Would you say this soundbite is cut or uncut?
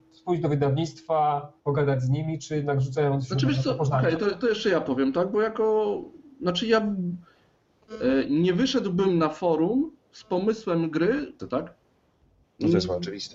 cut